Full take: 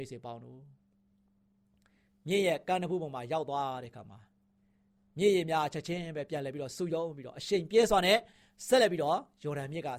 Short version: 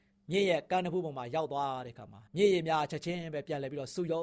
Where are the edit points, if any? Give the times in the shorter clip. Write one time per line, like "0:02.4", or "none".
0:02.3